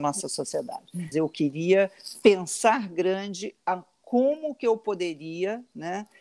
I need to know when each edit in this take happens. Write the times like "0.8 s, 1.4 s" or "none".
1.1 s

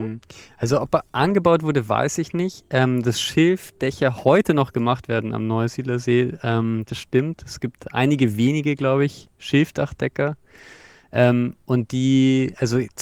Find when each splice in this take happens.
6.9 s

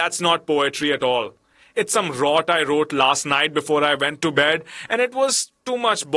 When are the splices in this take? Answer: none

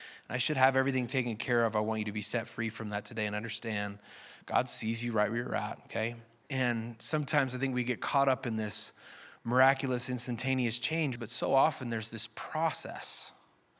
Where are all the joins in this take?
6.5 s, 11.2 s

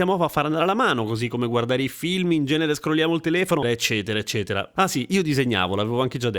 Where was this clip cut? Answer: 3.6 s, 4.8 s

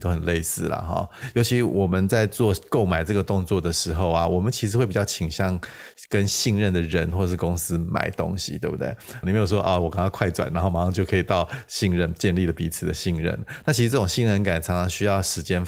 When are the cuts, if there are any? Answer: 9.2 s

